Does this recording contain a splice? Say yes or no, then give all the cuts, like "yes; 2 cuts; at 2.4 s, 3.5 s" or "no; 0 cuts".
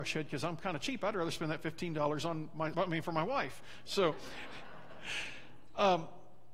yes; 1 cut; at 2.7 s